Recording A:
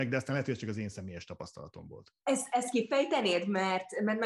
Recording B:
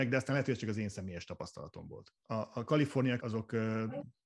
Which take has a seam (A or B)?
B